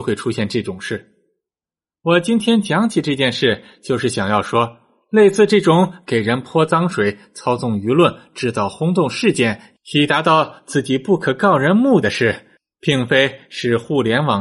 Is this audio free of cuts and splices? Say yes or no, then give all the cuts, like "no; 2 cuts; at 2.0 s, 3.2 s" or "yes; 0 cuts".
no; 1 cut; at 12.0 s